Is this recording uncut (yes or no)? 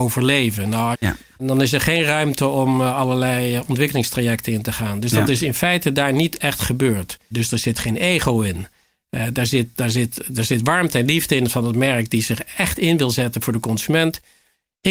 no